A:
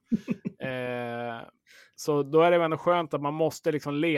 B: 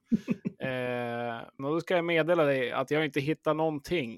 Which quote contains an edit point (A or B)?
B